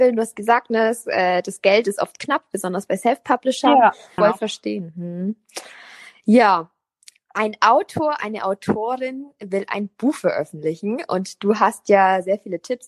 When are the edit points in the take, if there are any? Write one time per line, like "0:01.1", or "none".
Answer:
0:04.2